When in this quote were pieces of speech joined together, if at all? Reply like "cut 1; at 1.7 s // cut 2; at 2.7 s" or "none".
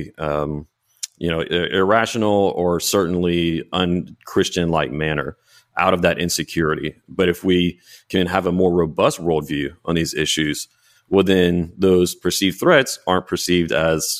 none